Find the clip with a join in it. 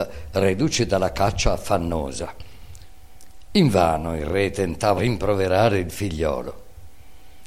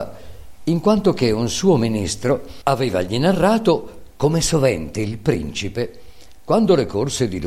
first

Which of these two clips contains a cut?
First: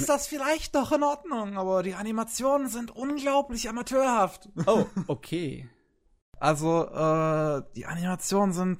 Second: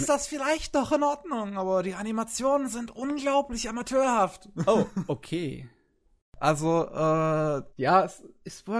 second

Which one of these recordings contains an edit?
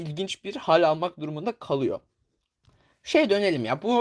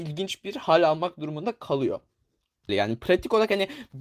second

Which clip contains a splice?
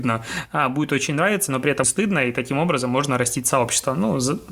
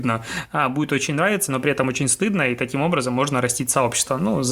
first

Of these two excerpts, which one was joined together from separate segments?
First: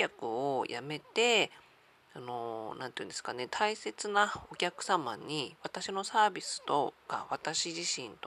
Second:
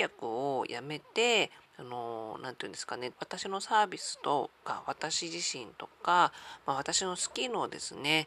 second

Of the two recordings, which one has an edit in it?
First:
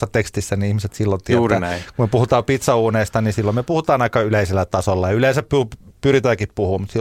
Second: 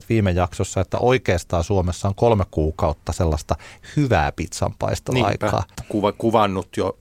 second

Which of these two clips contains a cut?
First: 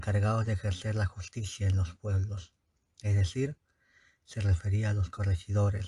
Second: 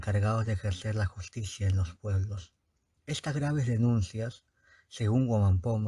second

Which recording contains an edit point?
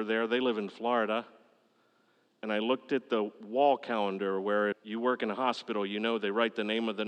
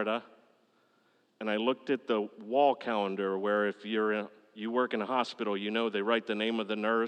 first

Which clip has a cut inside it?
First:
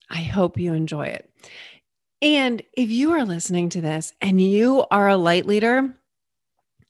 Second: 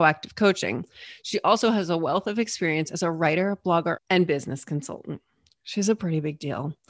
second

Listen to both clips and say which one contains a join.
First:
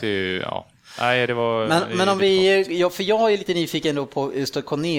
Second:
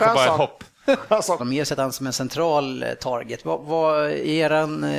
second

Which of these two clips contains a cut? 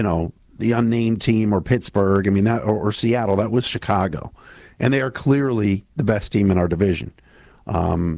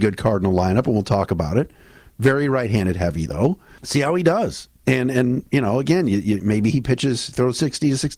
second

